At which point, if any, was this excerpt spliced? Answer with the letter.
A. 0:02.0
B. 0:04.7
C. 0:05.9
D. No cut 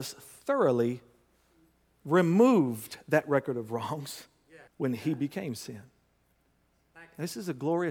B